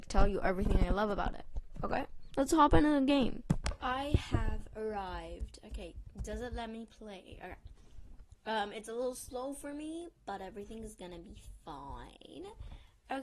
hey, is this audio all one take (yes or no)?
yes